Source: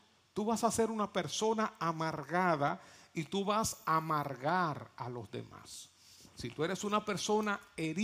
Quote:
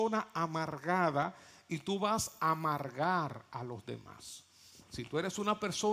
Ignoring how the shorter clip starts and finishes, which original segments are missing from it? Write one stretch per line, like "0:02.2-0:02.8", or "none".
none